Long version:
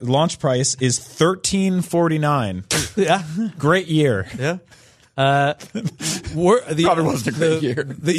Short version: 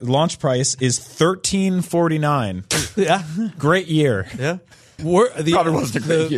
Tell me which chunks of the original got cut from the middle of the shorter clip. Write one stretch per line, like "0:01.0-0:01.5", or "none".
0:05.0-0:06.3

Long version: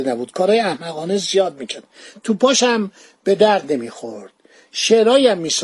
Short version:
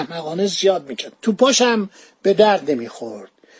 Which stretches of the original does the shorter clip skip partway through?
0:01.9-0:02.2

